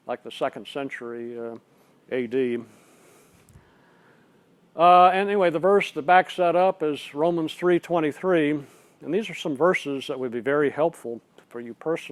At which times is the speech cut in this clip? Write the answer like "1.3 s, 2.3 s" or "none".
none